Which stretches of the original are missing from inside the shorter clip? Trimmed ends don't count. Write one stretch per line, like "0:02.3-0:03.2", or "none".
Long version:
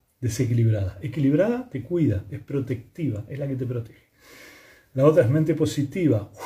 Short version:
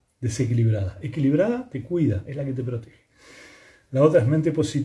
0:02.2-0:03.3

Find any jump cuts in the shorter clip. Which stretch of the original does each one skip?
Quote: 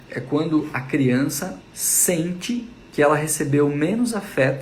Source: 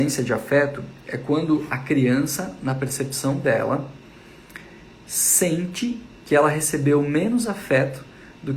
0:02.6-0:04.9

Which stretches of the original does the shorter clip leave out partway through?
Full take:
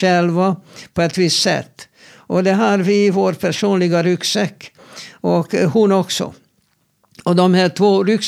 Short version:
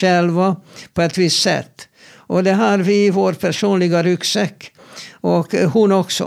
none

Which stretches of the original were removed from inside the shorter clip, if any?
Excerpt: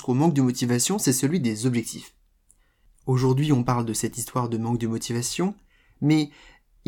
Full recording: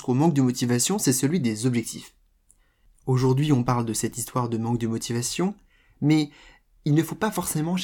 none

